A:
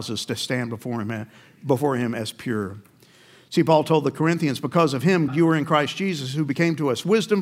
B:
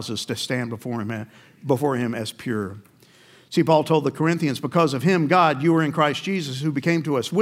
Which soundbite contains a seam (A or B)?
A